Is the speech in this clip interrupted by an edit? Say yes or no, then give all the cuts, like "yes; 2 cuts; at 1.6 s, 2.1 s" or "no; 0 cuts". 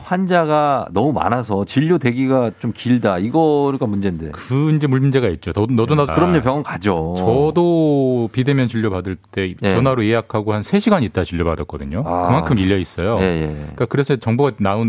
yes; 1 cut; at 6.1 s